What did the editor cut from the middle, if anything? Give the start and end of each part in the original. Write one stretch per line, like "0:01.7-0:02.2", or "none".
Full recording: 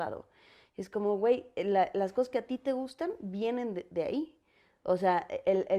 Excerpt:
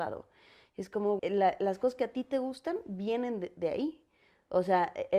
0:01.2-0:01.5